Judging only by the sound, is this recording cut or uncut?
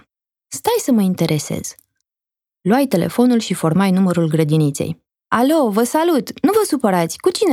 uncut